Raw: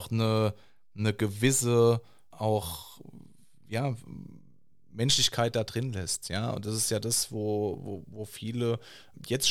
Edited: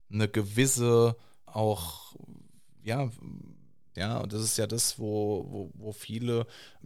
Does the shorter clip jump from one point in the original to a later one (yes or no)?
yes